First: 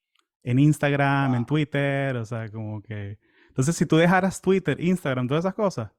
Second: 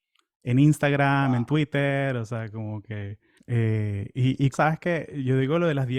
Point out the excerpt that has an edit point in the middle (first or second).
second